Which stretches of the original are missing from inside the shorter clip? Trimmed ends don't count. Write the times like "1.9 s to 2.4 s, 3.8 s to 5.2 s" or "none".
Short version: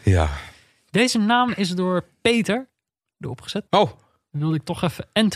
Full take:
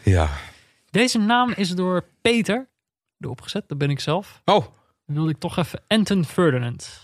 3.7 s to 4.4 s